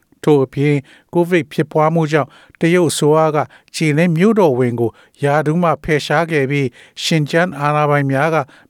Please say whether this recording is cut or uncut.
uncut